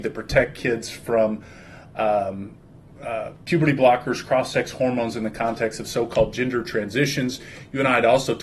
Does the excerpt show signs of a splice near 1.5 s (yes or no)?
no